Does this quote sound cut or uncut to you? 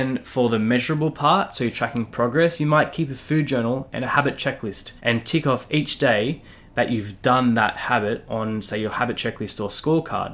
cut